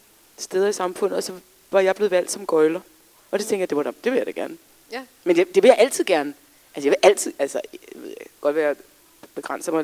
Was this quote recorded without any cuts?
no; 1 cut; at 8.4 s

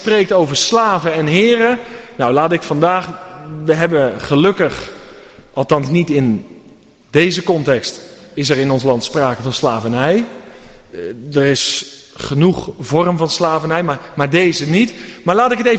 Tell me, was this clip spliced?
no; 0 cuts

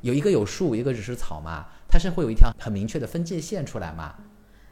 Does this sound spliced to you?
yes; 1 cut; at 2.5 s

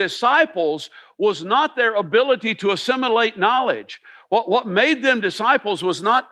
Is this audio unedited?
yes; 0 cuts

